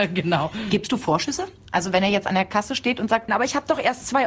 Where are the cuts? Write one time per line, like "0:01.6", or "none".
0:03.3